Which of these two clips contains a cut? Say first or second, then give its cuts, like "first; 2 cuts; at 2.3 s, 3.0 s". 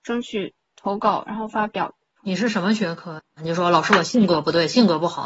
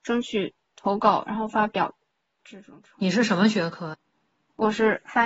first; 2 cuts; at 2.2 s, 3.4 s